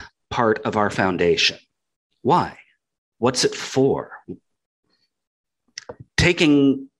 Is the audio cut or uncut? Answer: uncut